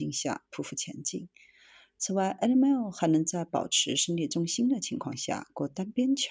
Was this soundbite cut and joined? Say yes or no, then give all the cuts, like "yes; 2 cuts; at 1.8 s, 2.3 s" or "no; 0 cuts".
no; 0 cuts